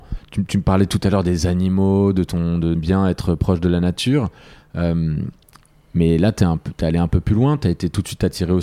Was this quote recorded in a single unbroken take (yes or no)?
no